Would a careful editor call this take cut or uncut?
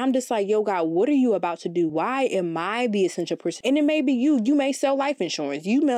cut